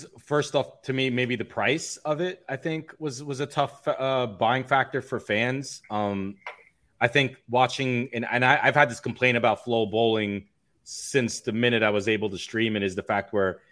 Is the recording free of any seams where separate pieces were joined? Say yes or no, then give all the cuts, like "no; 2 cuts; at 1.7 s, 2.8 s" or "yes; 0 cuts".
yes; 0 cuts